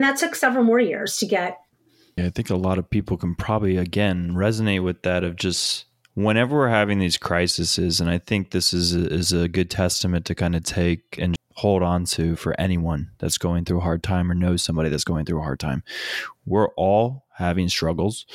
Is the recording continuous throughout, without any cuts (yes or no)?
no